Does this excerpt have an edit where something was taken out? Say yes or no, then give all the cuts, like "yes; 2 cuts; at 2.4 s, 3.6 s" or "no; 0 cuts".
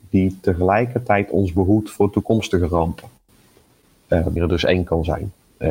yes; 1 cut; at 4.4 s